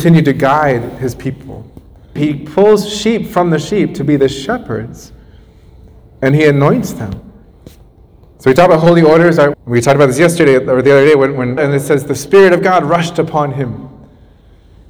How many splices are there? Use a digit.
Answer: 3